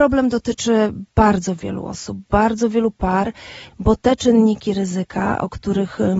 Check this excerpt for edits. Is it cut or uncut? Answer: cut